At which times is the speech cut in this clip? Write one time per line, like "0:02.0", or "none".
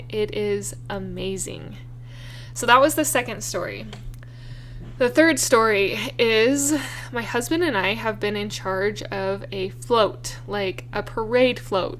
none